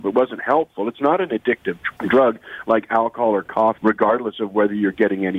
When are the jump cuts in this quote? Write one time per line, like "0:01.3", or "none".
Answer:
0:02.0
0:03.8

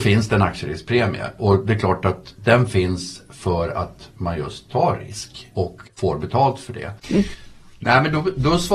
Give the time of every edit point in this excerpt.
0:07.0

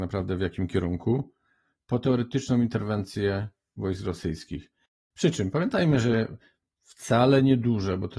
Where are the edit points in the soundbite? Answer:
none

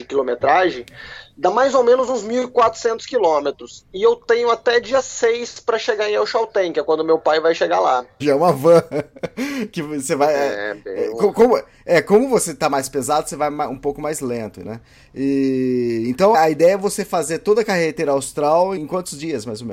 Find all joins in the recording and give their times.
0:08.2
0:16.3
0:18.8

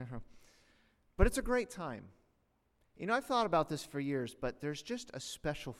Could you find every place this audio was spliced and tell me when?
none

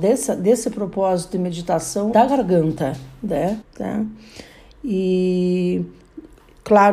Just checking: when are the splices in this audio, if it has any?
0:02.1
0:03.6

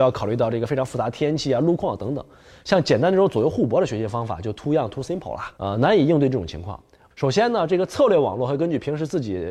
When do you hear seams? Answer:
0:05.6
0:07.1

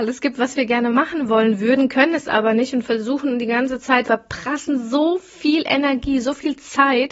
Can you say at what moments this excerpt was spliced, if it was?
0:04.0

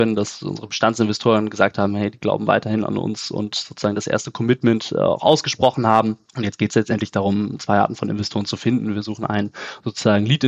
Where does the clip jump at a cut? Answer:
0:06.3

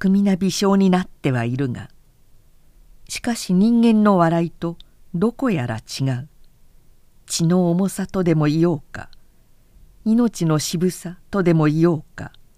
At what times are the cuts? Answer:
none

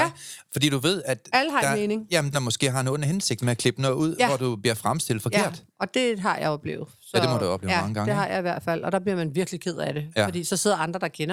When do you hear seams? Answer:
0:02.3

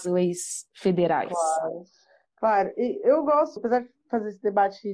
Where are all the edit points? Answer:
0:03.6

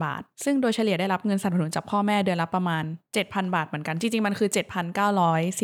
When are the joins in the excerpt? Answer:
0:03.0

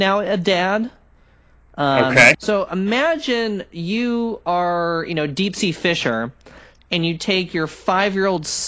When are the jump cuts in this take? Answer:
0:02.3

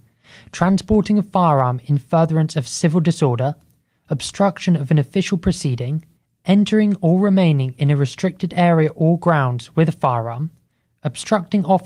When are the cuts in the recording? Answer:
none

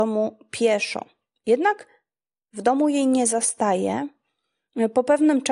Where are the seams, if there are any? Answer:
none

